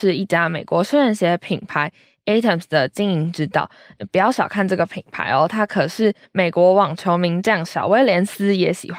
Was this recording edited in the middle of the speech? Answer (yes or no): no